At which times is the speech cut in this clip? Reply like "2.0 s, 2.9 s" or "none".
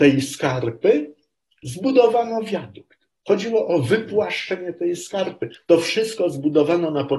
5.6 s